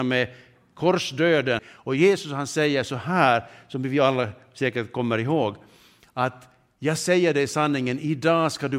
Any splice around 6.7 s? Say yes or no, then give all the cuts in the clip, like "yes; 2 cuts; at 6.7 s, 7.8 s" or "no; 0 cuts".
no; 1 cut; at 1.6 s